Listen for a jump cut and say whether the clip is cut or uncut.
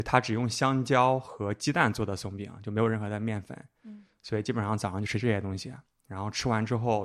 uncut